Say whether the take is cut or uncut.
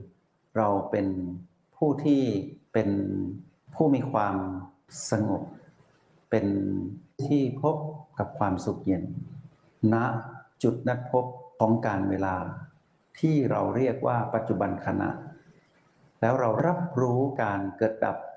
uncut